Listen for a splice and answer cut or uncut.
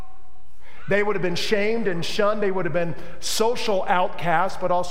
uncut